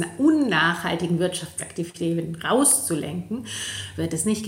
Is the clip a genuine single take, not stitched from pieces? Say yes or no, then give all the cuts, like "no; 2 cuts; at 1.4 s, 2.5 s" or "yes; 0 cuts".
yes; 0 cuts